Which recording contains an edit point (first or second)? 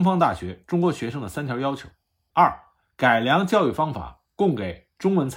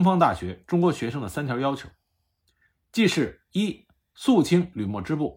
first